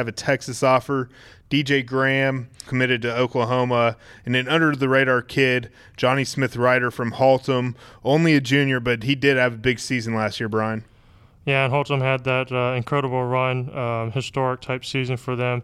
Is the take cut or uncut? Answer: cut